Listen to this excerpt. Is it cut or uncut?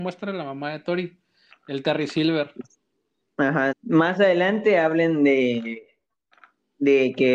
cut